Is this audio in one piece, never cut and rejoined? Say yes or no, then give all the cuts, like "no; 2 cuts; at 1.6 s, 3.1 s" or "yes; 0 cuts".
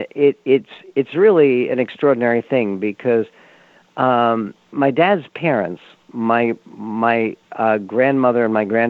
no; 1 cut; at 4.7 s